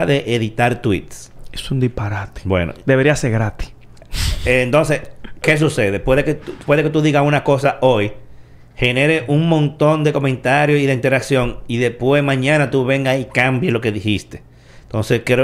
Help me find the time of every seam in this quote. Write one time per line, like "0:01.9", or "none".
0:04.0